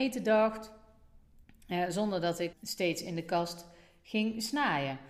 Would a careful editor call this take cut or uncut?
cut